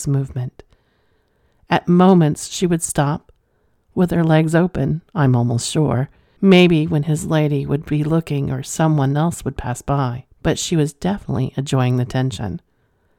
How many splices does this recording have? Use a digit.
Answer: 2